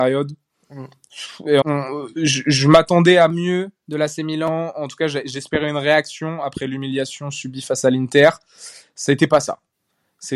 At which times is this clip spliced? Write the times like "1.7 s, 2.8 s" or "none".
1.6 s